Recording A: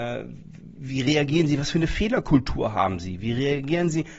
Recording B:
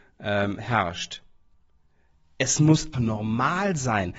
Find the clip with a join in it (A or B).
B